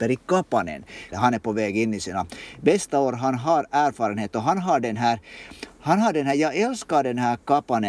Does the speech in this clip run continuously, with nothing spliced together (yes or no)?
no